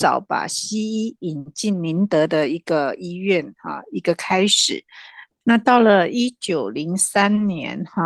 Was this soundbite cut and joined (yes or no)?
yes